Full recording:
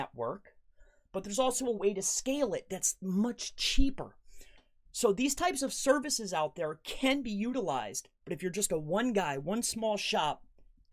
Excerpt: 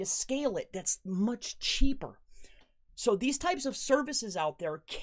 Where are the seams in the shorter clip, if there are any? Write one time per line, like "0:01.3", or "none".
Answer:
none

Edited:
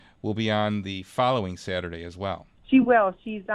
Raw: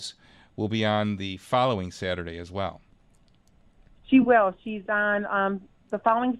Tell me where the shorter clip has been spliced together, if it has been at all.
0:02.6

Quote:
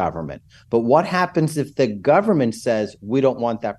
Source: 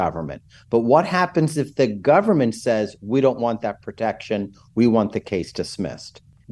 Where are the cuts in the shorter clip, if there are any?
none

